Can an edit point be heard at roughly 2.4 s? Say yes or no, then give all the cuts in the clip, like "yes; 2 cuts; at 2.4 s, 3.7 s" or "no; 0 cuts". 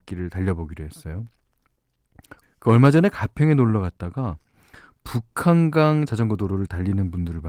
yes; 1 cut; at 2.4 s